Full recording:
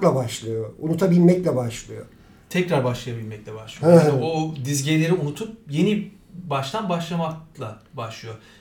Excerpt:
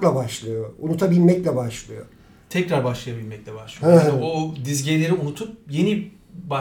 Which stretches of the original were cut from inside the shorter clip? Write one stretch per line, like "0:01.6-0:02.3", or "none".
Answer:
none